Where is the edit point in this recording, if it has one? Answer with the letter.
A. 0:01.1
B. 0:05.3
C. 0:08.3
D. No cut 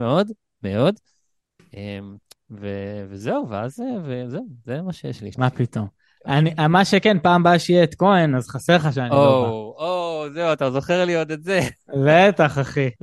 B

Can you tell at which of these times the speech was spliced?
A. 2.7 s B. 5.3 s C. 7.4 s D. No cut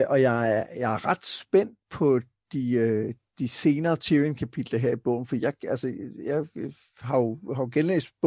D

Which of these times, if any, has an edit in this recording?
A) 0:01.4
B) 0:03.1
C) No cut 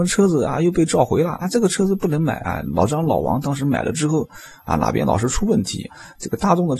A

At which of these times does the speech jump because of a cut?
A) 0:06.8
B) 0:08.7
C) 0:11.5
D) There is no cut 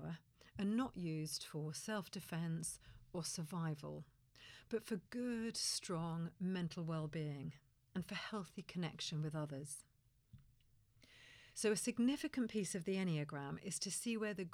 C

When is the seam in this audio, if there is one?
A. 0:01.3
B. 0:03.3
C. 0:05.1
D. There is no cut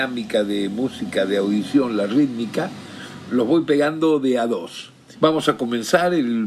C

